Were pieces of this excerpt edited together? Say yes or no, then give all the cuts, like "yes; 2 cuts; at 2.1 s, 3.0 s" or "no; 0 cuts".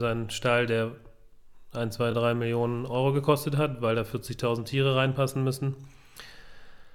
no; 0 cuts